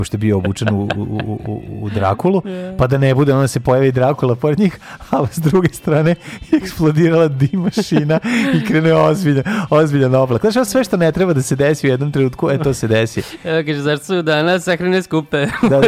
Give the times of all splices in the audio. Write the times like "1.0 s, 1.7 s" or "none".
none